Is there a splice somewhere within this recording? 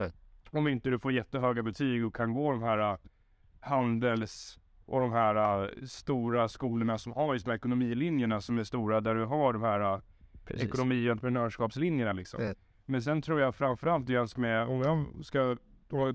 no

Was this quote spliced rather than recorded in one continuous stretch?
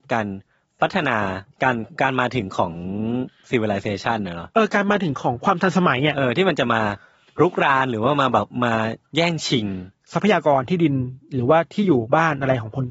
yes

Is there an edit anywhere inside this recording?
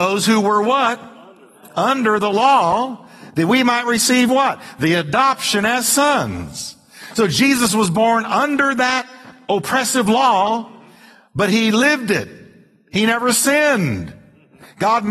no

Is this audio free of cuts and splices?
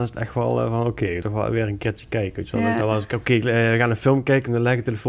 yes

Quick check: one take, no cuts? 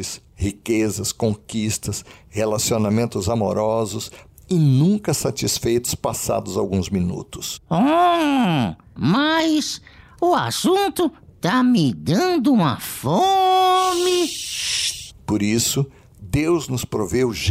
no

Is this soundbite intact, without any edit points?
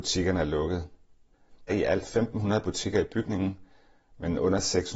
no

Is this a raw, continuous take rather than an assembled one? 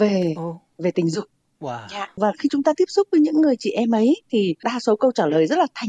yes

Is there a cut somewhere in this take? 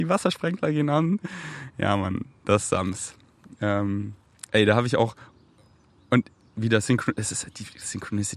no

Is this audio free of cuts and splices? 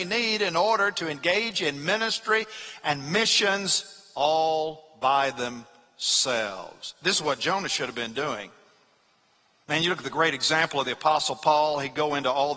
no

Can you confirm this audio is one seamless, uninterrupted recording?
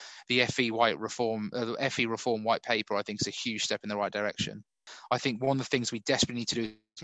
yes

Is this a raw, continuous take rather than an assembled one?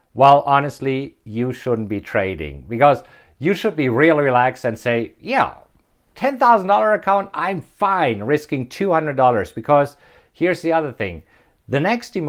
yes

